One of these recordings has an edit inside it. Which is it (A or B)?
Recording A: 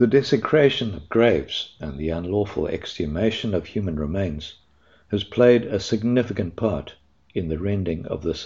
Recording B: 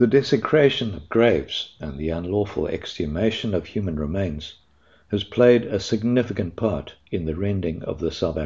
B